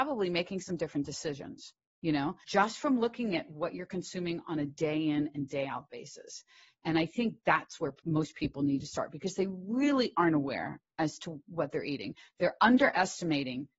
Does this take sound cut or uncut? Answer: cut